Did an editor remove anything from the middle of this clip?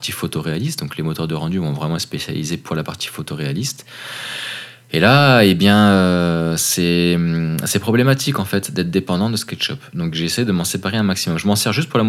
no; 0 cuts

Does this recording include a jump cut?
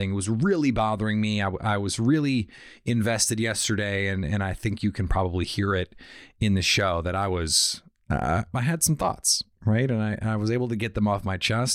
no; 0 cuts

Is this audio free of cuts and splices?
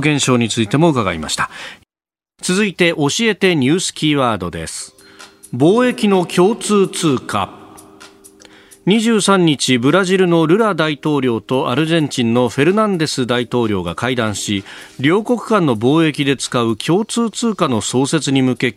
yes; 0 cuts

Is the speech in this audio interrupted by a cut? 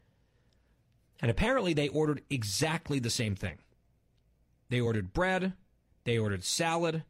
no; 0 cuts

